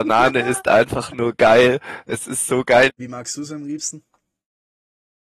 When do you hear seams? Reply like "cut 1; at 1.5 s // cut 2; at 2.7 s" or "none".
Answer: cut 1; at 2.9 s